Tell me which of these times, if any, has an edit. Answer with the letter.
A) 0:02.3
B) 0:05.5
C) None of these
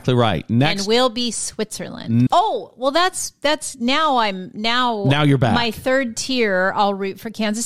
A